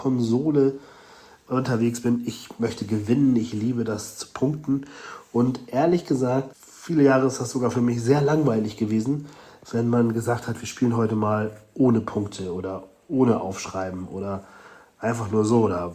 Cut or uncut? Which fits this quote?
uncut